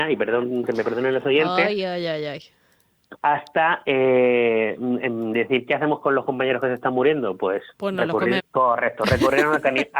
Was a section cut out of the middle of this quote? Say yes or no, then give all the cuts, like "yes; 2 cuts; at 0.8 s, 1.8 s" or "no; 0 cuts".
yes; 1 cut; at 8.4 s